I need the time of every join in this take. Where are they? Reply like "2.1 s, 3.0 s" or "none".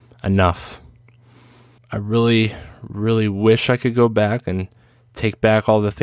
1.8 s